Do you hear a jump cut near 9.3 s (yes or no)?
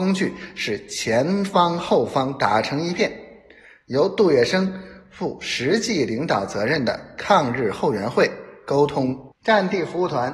yes